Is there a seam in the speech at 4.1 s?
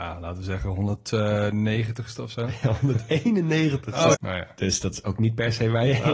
yes; 1 cut; at 4.1 s

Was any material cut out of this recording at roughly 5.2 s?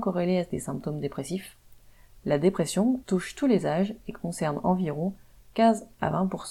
no; 1 cut; at 3.0 s

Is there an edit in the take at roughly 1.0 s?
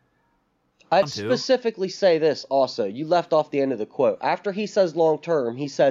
yes; 1 cut; at 1.0 s

